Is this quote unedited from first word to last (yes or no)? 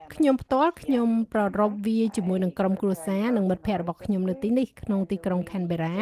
yes